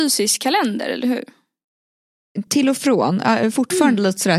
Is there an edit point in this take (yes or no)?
no